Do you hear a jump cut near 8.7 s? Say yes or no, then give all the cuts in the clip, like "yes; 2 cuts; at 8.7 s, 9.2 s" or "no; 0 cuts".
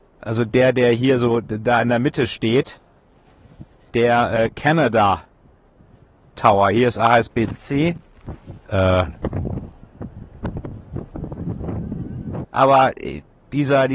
yes; 2 cuts; at 8.7 s, 12.4 s